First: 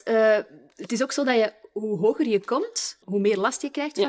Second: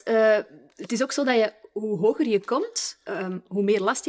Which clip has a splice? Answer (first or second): first